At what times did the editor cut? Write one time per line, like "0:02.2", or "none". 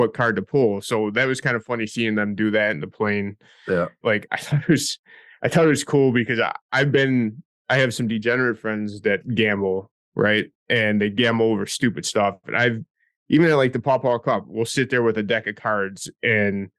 0:04.0

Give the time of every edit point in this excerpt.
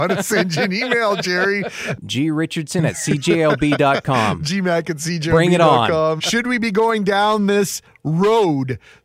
0:02.0
0:06.2

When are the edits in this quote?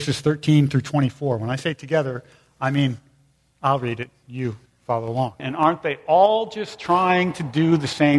0:05.4

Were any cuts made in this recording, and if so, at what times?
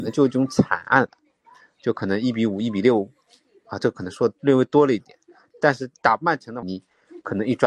0:06.6

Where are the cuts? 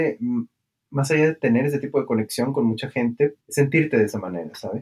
0:03.4

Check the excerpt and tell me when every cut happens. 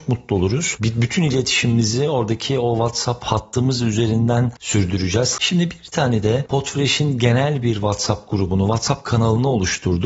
0:05.4

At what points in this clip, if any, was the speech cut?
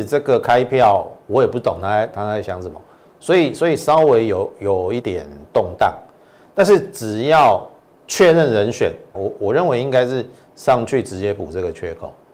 0:05.0
0:09.1

